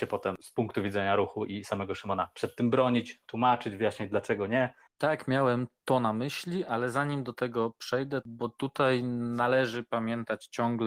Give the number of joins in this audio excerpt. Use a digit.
2